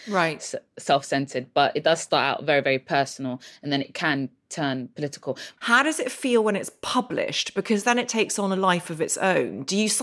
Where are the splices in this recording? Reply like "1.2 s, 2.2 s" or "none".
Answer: 5.6 s